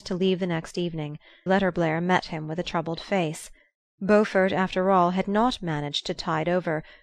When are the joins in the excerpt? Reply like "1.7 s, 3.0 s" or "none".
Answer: 1.5 s